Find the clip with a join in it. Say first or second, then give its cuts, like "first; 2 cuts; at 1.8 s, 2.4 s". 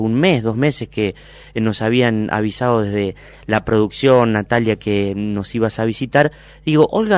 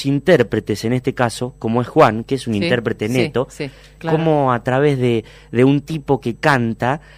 second; 1 cut; at 4.0 s